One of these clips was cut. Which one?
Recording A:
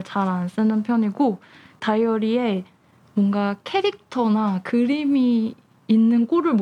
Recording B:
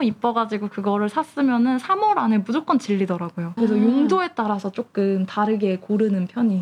B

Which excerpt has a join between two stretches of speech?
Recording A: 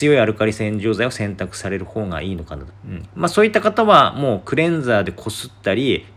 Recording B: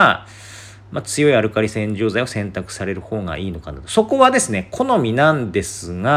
A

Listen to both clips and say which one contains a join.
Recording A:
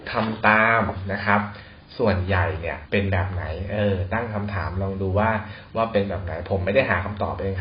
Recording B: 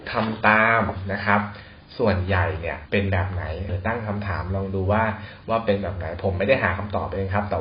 B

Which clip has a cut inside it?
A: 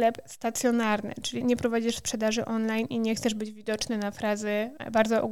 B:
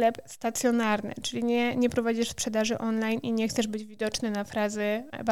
A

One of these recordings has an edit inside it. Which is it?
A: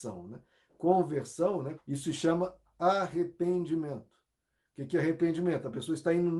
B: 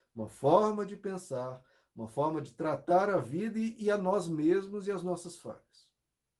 A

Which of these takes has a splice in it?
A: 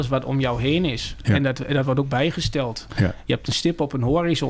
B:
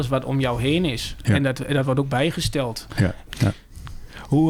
B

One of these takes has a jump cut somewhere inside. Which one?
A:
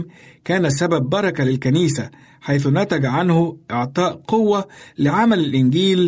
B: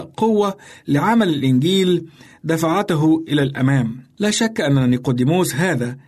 B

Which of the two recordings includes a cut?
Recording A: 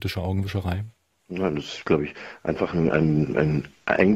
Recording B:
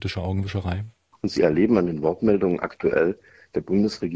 B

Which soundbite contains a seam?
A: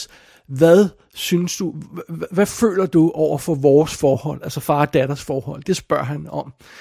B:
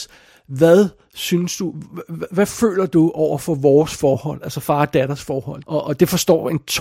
B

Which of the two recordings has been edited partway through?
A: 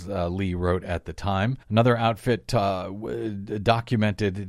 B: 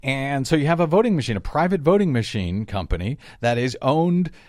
A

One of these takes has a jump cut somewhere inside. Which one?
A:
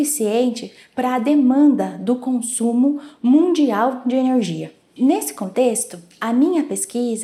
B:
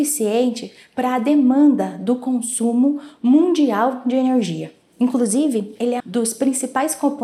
B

